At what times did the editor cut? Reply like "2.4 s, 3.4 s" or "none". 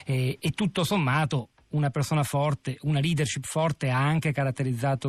none